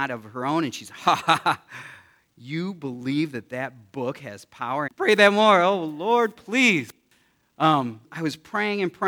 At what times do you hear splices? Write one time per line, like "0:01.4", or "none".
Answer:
0:04.9
0:08.0